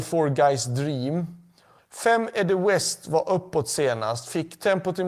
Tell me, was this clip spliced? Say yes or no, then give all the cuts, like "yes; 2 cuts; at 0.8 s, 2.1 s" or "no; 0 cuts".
yes; 1 cut; at 1.8 s